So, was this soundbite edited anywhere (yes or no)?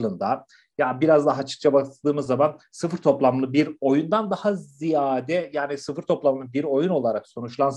no